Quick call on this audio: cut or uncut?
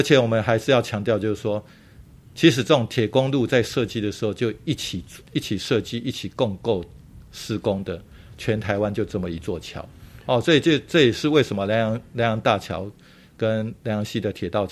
uncut